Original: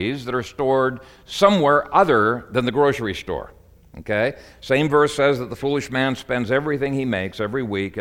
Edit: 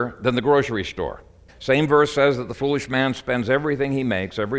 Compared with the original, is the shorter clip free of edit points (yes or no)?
no